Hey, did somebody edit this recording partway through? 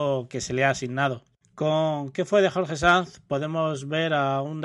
no; 0 cuts

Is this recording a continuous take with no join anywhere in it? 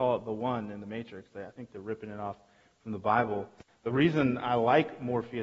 no; 1 cut; at 3.7 s

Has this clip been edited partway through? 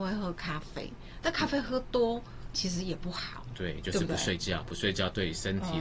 no; 0 cuts

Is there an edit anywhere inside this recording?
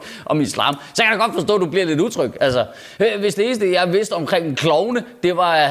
no; 0 cuts

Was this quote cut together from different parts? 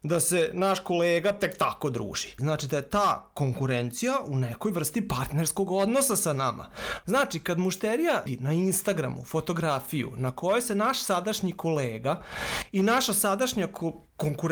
yes; 3 cuts; at 2.4 s, 7.0 s, 8.3 s

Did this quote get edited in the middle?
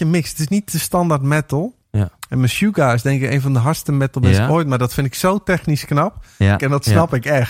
yes; 1 cut; at 6.6 s

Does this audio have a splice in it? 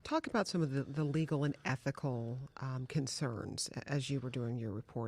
no; 0 cuts

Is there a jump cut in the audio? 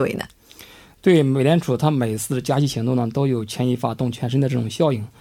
no; 0 cuts

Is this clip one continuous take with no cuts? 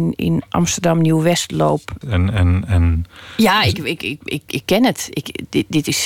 no; 1 cut; at 2.0 s

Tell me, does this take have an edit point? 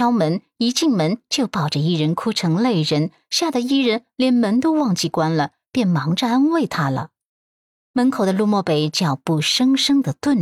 no; 0 cuts

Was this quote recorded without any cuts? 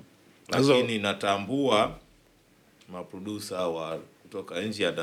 yes; 0 cuts

